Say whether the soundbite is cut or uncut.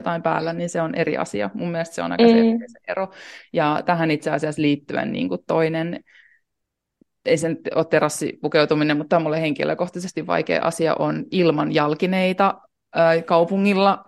uncut